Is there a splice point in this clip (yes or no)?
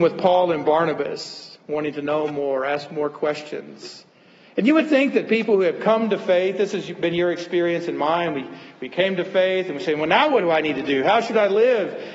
no